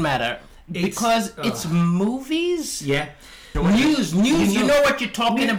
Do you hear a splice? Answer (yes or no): yes